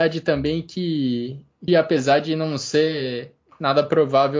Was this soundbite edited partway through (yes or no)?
yes